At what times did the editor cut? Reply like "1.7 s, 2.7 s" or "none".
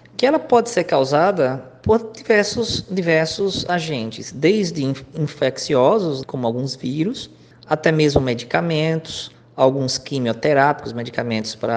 6.2 s